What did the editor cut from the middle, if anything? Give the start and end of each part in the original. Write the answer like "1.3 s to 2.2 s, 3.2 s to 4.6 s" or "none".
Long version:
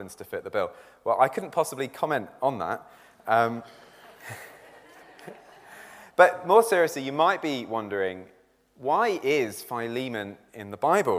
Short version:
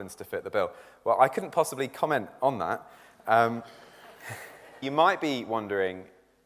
4.8 s to 7.0 s